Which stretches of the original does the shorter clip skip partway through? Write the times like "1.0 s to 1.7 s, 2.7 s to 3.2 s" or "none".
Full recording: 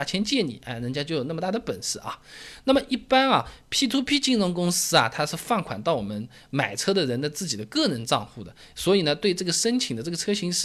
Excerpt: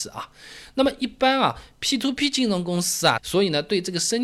5.1 s to 8.7 s